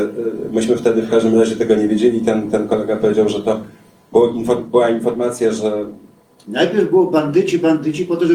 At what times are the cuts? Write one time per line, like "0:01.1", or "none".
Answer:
none